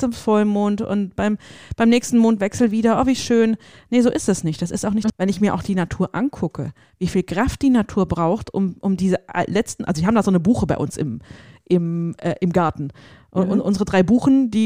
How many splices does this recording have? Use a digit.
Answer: 1